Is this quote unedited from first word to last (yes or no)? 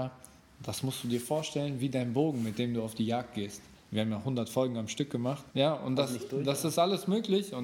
no